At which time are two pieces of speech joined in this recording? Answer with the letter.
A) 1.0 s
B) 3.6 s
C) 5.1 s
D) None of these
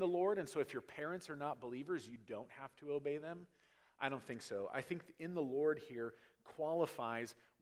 D